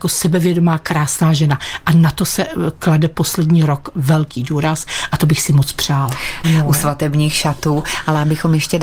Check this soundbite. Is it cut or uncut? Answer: cut